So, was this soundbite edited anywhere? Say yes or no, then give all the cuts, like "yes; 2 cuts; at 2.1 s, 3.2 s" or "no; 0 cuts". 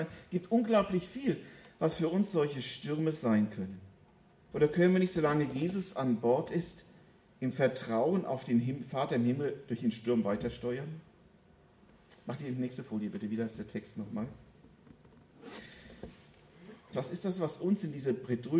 yes; 2 cuts; at 4.5 s, 16.9 s